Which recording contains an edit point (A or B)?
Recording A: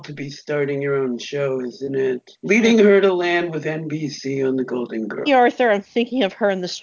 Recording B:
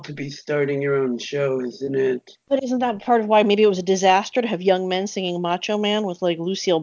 A